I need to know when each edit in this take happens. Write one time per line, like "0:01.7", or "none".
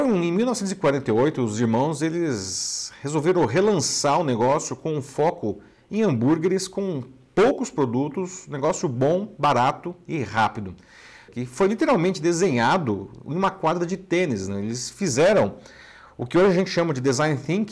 0:11.3